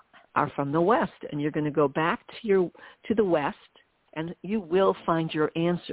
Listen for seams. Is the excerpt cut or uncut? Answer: cut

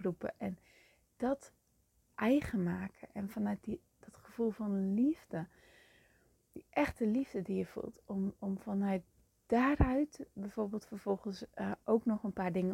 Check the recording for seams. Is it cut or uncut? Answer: uncut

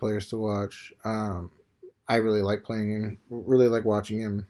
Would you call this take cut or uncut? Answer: uncut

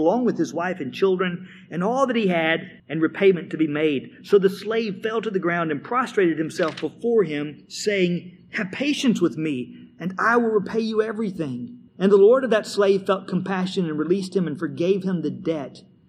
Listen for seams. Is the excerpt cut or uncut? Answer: cut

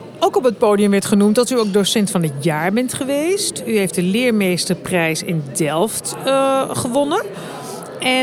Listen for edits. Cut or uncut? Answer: uncut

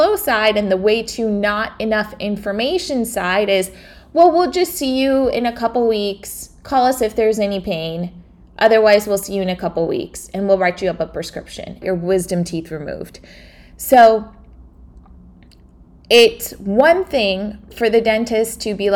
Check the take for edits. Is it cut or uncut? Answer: cut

